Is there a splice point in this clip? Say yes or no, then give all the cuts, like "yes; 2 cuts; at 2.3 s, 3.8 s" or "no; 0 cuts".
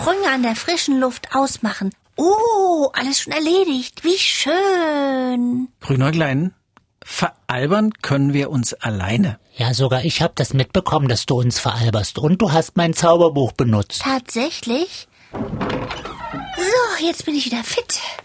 yes; 2 cuts; at 2.0 s, 15.3 s